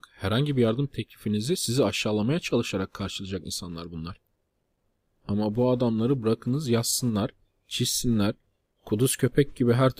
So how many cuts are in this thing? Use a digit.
1